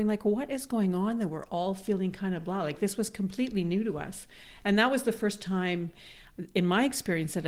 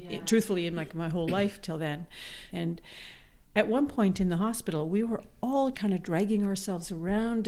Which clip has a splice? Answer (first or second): second